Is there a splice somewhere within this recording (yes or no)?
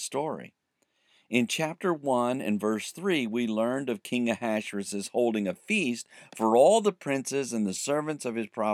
no